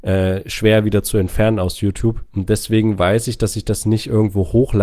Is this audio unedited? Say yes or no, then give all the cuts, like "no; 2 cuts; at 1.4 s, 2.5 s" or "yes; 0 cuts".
no; 1 cut; at 2.3 s